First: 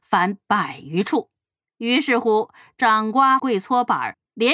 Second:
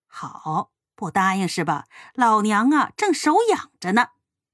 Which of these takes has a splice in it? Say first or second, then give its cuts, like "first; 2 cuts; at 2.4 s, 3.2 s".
first; 2 cuts; at 1.7 s, 3.4 s